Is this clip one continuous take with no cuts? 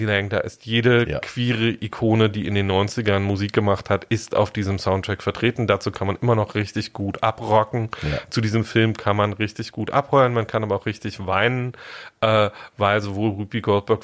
yes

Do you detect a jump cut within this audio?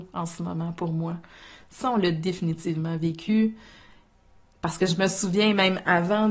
no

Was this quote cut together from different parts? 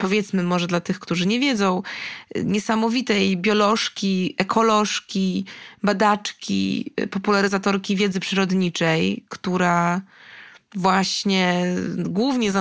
no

